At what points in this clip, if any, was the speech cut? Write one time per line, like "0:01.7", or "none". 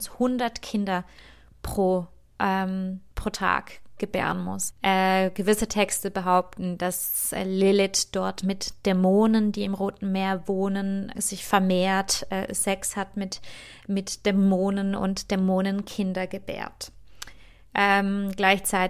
0:04.7
0:11.1